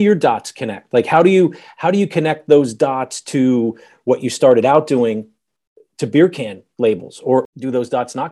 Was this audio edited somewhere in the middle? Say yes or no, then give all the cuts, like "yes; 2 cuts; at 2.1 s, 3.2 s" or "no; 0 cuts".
no; 0 cuts